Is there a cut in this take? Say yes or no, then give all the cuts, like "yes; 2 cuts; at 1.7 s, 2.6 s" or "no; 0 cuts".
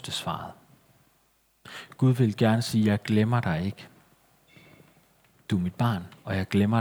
no; 0 cuts